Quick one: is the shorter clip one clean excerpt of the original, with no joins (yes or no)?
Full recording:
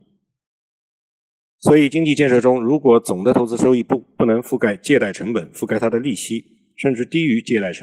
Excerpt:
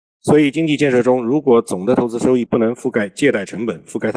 no